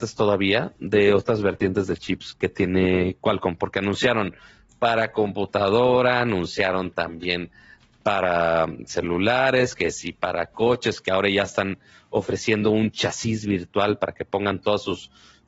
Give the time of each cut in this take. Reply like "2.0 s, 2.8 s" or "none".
2.3 s